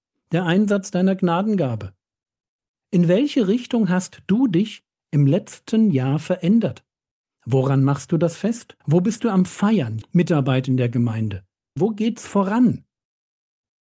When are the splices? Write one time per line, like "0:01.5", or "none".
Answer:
0:08.8
0:10.0
0:11.8